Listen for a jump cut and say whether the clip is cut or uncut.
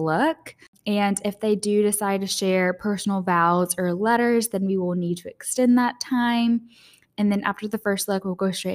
uncut